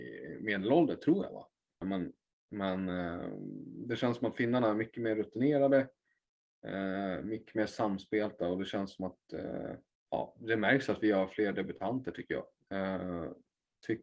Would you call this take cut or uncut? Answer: cut